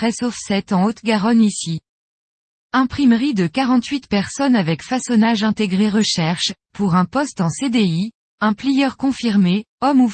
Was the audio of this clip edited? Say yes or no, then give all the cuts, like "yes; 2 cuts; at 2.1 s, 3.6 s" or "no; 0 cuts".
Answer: no; 0 cuts